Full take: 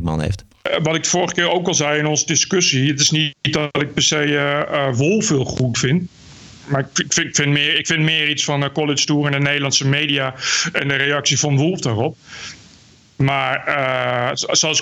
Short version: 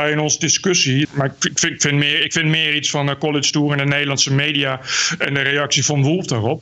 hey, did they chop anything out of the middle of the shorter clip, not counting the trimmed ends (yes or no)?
yes